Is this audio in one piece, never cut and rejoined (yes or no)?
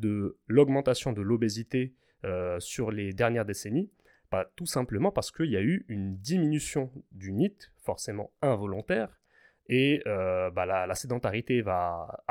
yes